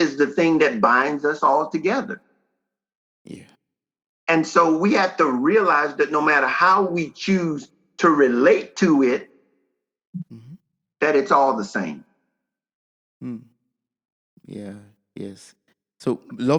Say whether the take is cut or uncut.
uncut